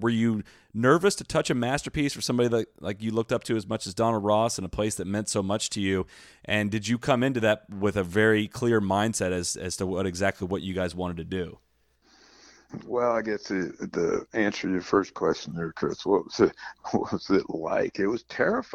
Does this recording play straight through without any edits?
yes; 0 cuts

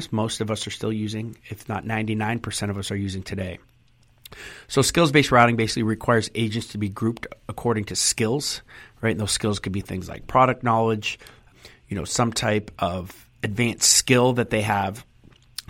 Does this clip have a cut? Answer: no; 0 cuts

